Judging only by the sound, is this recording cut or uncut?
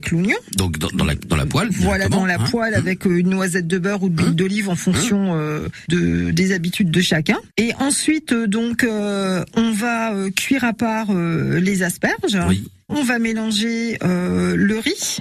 cut